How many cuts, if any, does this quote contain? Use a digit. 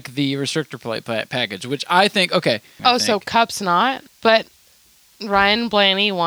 2